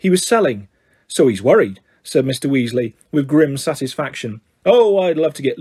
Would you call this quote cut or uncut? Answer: uncut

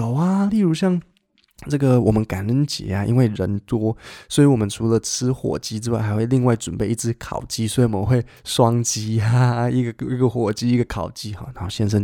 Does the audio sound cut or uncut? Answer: uncut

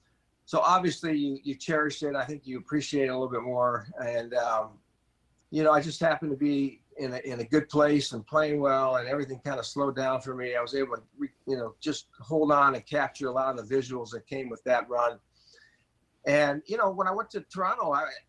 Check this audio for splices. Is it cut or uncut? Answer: uncut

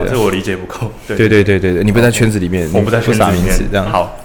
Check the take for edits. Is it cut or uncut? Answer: uncut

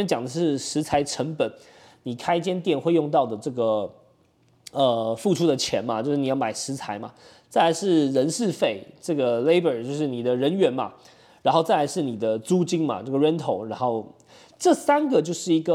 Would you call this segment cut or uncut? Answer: uncut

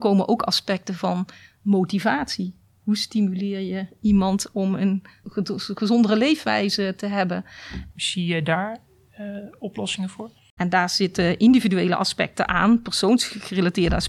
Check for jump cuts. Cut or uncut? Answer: cut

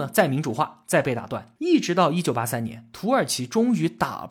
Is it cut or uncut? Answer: cut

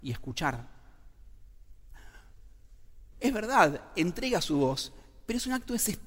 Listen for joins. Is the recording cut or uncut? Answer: cut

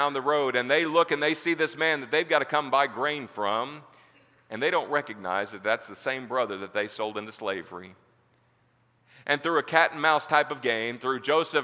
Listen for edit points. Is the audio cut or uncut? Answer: uncut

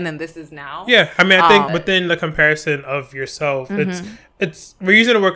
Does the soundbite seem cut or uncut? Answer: cut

